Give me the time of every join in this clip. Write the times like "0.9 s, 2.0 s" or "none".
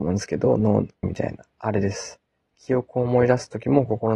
1.0 s, 2.4 s

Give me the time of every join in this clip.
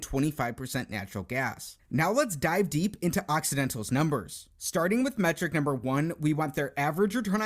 none

